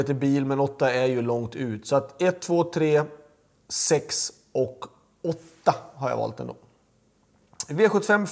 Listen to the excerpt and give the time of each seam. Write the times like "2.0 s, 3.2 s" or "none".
none